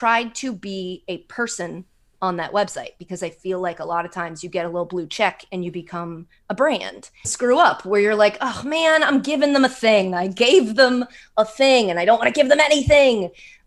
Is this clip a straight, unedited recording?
no; 1 cut; at 7.2 s

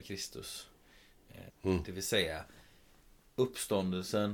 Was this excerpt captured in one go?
no; 1 cut; at 1.5 s

